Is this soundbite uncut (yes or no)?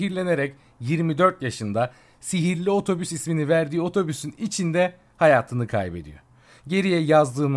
yes